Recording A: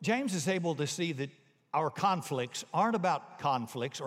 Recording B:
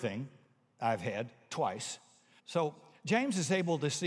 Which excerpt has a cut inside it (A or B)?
B